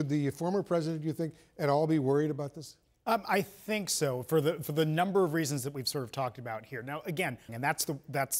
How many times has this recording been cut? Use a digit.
1